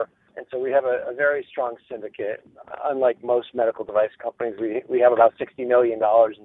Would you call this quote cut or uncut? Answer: uncut